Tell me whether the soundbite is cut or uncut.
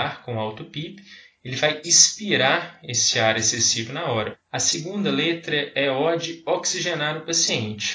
cut